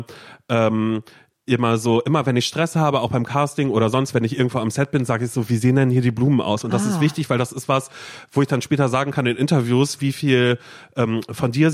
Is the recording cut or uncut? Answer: uncut